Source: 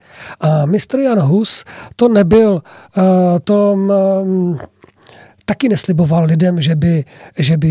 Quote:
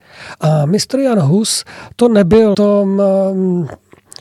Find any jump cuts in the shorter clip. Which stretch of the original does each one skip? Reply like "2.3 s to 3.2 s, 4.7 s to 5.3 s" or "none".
2.5 s to 3.4 s